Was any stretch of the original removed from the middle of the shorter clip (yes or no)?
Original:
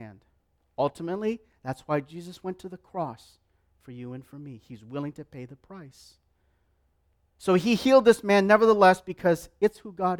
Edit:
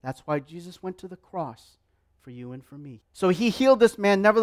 yes